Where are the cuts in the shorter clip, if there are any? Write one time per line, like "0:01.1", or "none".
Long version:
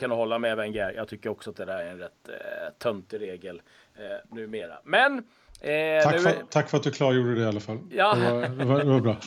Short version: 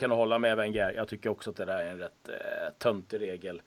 none